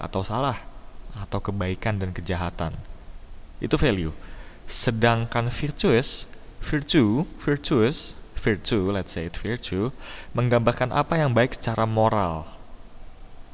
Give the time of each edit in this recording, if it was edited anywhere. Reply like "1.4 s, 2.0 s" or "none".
none